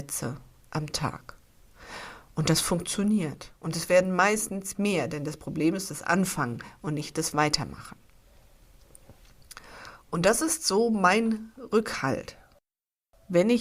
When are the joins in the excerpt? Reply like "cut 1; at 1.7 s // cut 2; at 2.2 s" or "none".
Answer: none